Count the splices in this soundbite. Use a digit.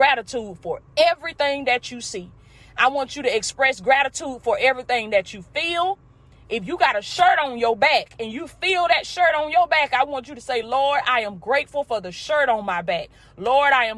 0